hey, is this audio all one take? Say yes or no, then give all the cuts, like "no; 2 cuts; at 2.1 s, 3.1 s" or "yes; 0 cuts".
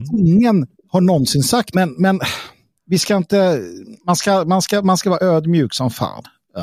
no; 1 cut; at 1.7 s